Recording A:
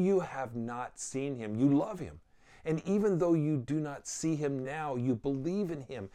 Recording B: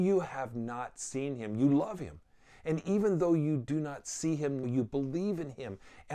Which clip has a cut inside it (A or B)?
B